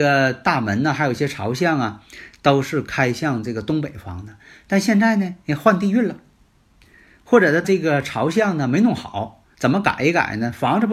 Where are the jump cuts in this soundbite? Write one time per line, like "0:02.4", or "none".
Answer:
0:07.6
0:09.5